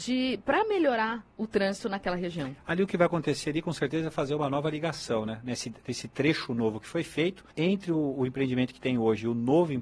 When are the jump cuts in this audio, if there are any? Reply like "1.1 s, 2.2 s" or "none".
7.5 s